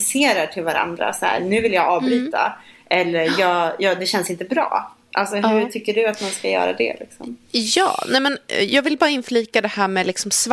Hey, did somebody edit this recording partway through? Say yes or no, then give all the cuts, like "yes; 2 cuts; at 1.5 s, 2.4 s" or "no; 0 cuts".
no; 0 cuts